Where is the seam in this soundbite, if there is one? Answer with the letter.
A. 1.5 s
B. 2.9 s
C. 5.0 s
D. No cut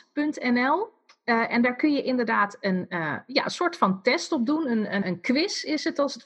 C